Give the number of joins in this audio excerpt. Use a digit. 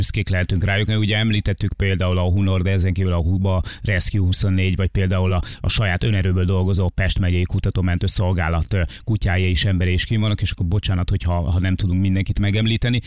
0